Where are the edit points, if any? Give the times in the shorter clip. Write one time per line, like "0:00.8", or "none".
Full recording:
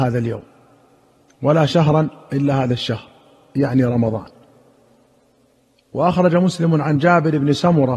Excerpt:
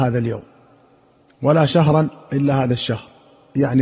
none